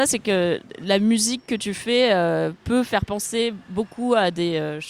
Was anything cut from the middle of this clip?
no; 0 cuts

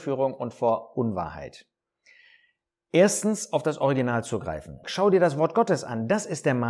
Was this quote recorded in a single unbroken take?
no; 1 cut; at 4.8 s

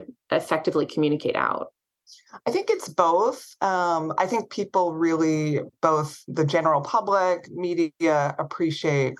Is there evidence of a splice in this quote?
no; 0 cuts

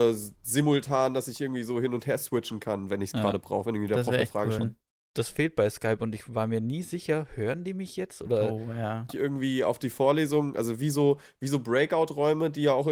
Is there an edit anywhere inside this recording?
yes; 2 cuts; at 4.6 s, 9.1 s

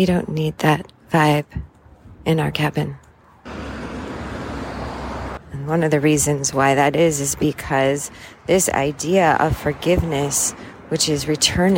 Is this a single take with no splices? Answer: no; 1 cut; at 5.4 s

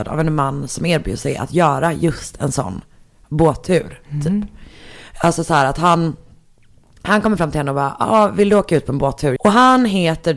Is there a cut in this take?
yes; 1 cut; at 9.4 s

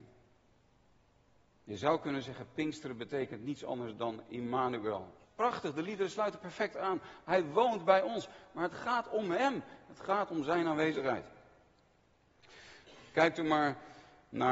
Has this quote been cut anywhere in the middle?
yes; 1 cut; at 5.2 s

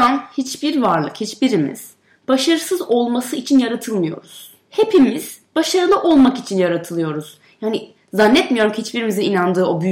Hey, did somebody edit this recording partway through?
yes; 1 cut; at 4.6 s

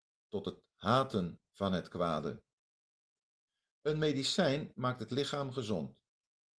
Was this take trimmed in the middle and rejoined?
no; 0 cuts

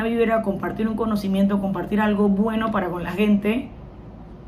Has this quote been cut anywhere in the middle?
no; 0 cuts

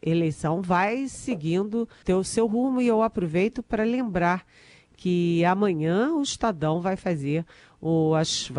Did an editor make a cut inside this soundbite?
yes; 1 cut; at 2.0 s

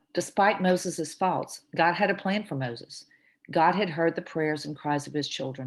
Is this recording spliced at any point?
no; 0 cuts

